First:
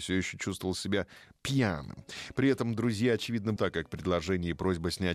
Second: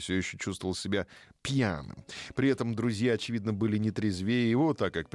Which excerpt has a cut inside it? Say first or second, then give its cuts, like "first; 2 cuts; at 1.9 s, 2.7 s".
first; 1 cut; at 3.6 s